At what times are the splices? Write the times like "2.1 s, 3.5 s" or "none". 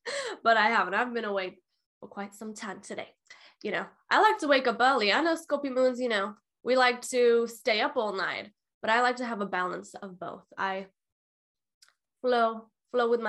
none